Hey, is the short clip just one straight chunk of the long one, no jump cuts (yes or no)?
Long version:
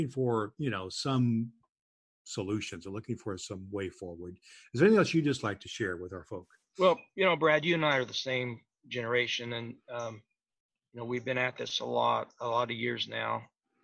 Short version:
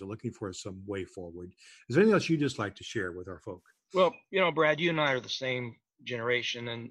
yes